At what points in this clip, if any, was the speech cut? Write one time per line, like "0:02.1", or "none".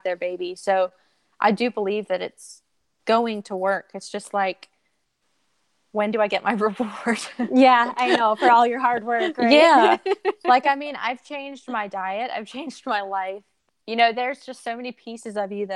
none